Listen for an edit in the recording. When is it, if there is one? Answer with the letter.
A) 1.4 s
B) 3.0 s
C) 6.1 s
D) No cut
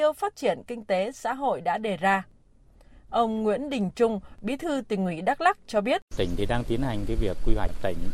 C